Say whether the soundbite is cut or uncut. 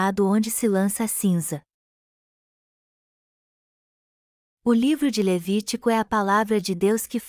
cut